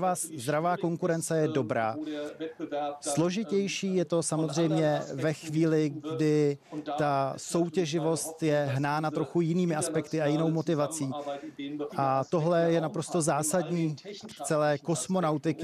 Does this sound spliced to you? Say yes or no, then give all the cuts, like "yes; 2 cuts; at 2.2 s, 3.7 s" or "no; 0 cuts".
yes; 2 cuts; at 11.9 s, 14.2 s